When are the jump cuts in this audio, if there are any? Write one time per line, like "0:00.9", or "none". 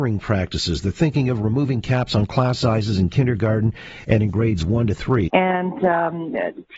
0:05.3

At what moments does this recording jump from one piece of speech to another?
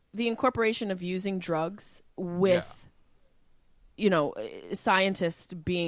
0:02.1

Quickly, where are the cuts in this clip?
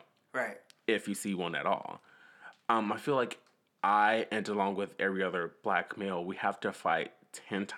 none

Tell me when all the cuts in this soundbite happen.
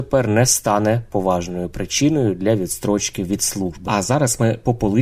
0:03.9

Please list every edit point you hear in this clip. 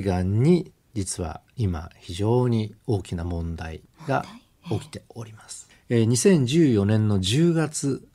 0:05.7

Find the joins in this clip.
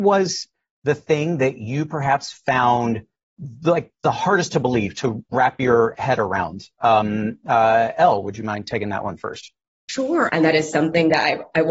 0:10.3

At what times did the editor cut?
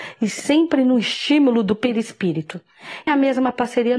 0:03.1

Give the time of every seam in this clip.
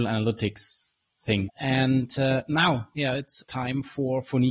0:01.5
0:03.4

